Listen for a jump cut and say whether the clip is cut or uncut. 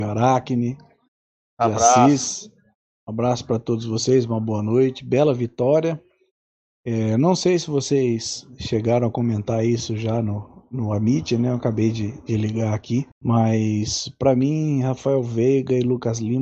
cut